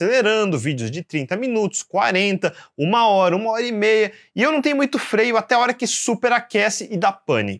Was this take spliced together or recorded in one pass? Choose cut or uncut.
uncut